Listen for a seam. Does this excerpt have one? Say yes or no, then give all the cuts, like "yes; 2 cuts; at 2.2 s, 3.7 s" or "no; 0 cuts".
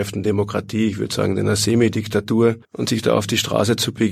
yes; 1 cut; at 2.6 s